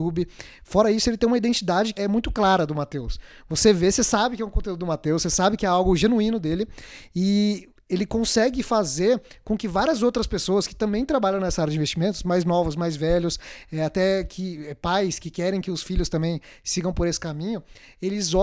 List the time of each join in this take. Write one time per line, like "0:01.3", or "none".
0:02.0